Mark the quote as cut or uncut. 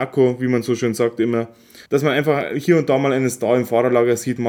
cut